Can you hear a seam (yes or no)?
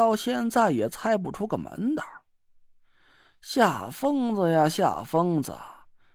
no